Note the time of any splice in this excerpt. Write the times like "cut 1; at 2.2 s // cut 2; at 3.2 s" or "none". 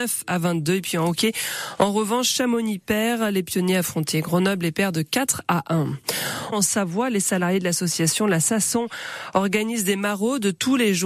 cut 1; at 6.5 s